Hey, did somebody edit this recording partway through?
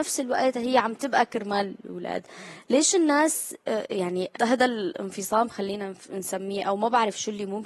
yes; 1 cut; at 4.4 s

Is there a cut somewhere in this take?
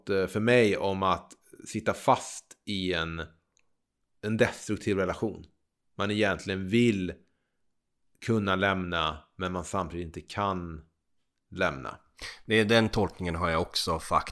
no; 0 cuts

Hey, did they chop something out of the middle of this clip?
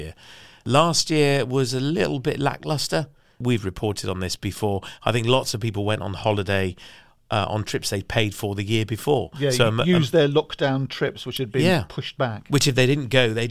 no; 0 cuts

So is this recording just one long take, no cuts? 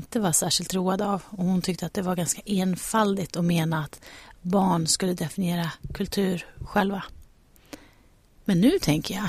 yes; 0 cuts

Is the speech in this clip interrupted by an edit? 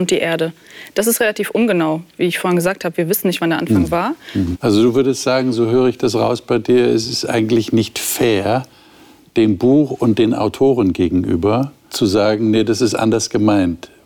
yes; 2 cuts; at 4.5 s, 11.9 s

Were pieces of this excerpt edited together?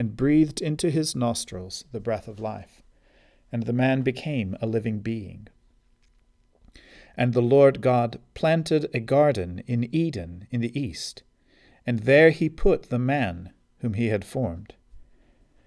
no; 0 cuts

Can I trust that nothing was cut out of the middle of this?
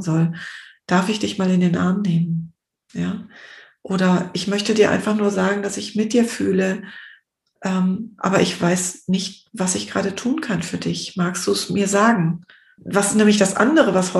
no; 1 cut; at 12.8 s

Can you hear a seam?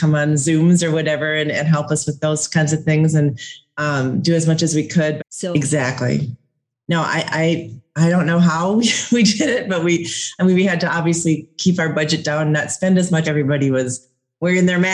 yes; 2 cuts; at 5.2 s, 13.2 s

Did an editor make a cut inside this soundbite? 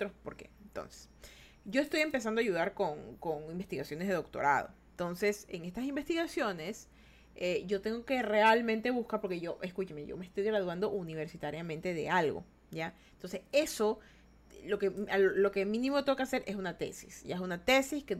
no; 0 cuts

